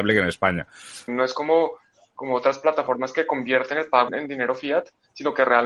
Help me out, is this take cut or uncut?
cut